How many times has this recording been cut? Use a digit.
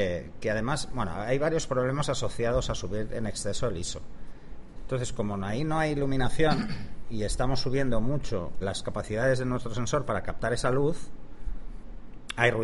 2